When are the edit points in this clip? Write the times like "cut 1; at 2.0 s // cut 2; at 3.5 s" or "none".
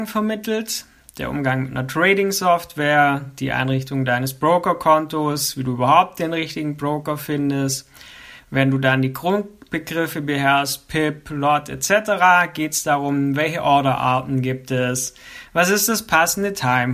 none